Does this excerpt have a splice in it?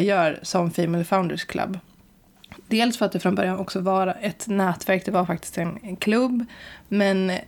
no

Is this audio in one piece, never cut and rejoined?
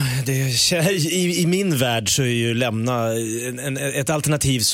yes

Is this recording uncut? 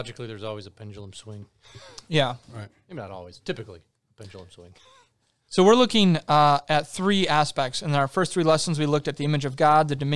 yes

